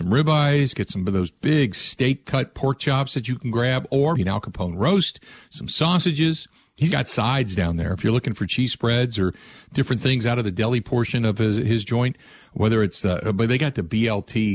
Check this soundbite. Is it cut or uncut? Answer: cut